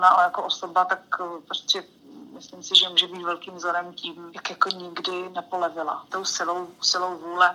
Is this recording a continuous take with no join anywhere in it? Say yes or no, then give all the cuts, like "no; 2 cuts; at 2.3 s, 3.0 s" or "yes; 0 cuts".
yes; 0 cuts